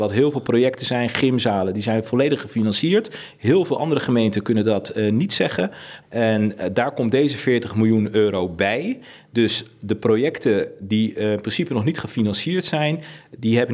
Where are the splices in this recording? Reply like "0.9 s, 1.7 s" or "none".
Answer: 6.0 s